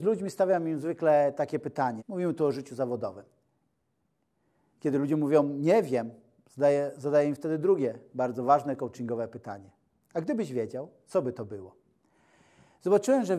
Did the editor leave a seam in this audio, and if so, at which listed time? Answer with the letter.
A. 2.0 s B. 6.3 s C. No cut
A